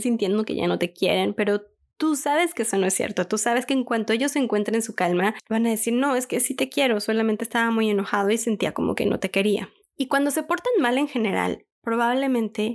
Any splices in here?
no; 0 cuts

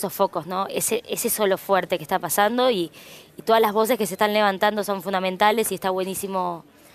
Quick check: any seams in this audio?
no; 0 cuts

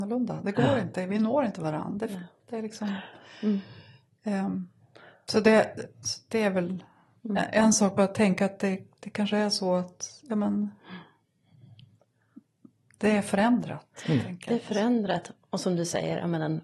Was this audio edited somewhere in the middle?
no; 0 cuts

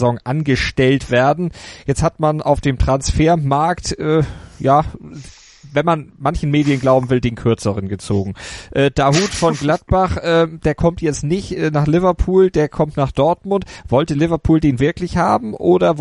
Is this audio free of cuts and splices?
yes; 0 cuts

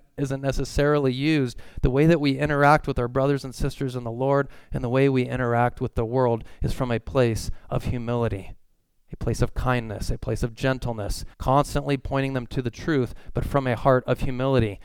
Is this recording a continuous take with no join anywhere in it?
no; 1 cut; at 11.3 s

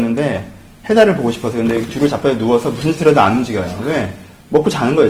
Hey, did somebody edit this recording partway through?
no; 0 cuts

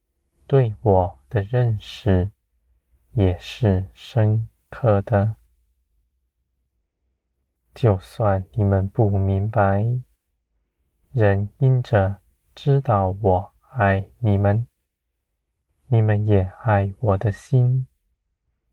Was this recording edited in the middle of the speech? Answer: yes; 1 cut; at 7.6 s

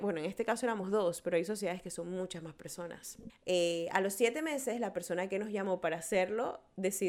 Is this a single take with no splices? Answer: no; 1 cut; at 3.3 s

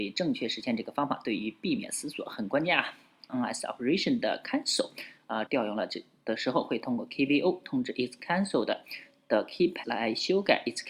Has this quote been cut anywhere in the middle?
yes; 3 cuts; at 3.3 s, 5.5 s, 9.8 s

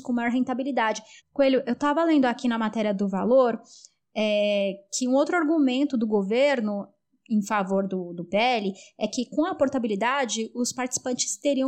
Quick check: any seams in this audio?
yes; 1 cut; at 1.2 s

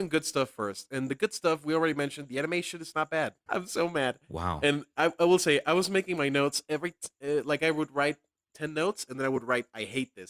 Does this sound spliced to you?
yes; 1 cut; at 3.5 s

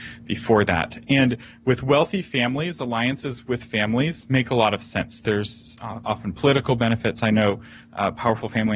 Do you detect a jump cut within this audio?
no; 0 cuts

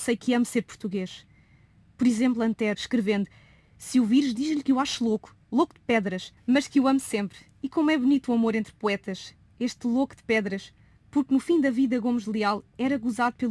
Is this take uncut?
no; 1 cut; at 2.7 s

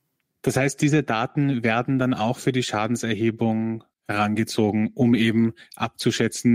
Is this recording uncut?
no; 1 cut; at 3.9 s

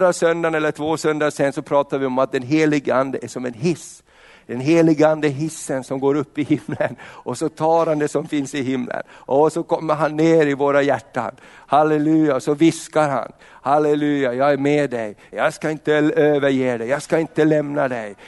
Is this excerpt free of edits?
no; 1 cut; at 15.3 s

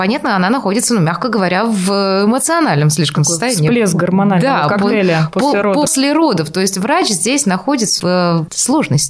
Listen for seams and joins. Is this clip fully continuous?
no; 1 cut; at 8.0 s

